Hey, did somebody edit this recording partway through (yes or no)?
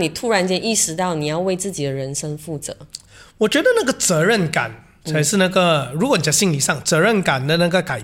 no